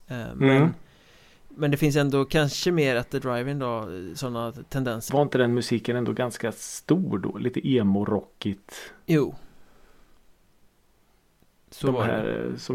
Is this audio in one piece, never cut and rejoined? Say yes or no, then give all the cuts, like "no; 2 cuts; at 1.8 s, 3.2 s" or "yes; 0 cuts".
no; 1 cut; at 5.1 s